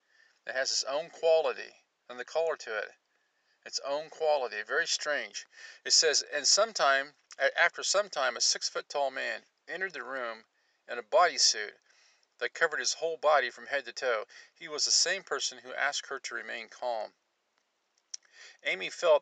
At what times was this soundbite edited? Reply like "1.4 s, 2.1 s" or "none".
none